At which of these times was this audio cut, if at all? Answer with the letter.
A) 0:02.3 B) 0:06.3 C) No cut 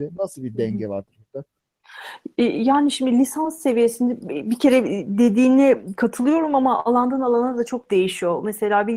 C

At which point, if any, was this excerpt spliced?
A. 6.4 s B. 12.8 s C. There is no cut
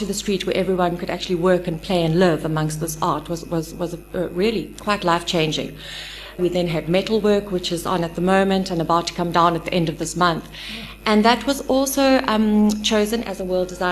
A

